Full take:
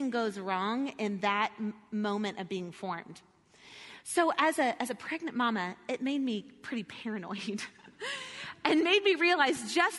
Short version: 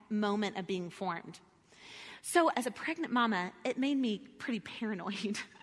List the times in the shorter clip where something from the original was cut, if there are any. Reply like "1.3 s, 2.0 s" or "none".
2.5 s